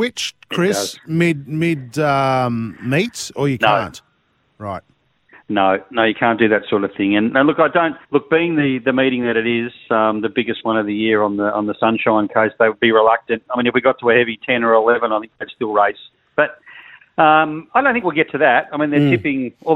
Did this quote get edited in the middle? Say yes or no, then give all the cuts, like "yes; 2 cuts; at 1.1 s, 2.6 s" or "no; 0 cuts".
yes; 1 cut; at 8.0 s